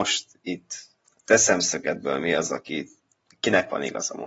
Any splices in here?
no; 0 cuts

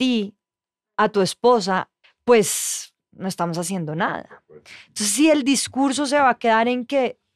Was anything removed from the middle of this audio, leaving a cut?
yes; 1 cut; at 2.0 s

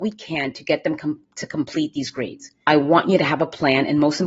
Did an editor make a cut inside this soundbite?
yes; 1 cut; at 2.6 s

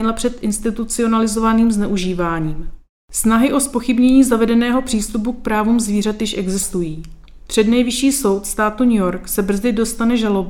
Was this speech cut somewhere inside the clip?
yes; 1 cut; at 3.0 s

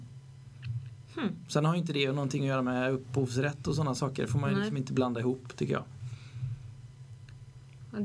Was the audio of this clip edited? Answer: no; 0 cuts

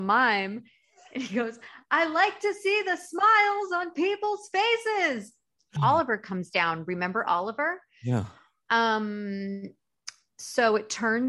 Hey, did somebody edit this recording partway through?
yes; 1 cut; at 5.8 s

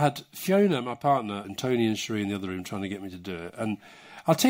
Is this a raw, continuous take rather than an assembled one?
no; 1 cut; at 1.4 s

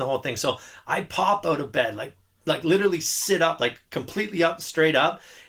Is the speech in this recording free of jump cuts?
yes; 0 cuts

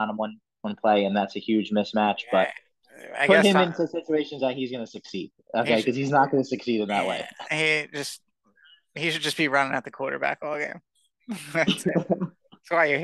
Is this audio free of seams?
yes; 0 cuts

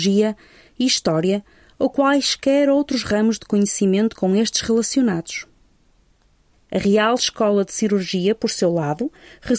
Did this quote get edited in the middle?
no; 0 cuts

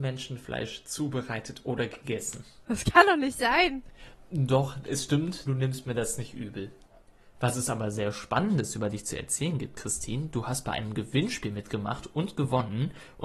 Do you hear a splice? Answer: yes; 1 cut; at 5.5 s

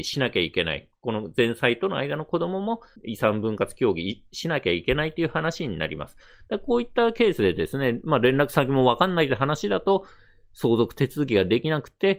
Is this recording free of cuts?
yes; 0 cuts

